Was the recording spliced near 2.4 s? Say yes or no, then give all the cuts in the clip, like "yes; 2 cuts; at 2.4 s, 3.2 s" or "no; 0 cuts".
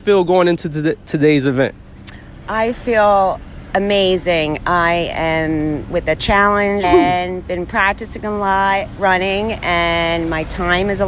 no; 1 cut; at 6.8 s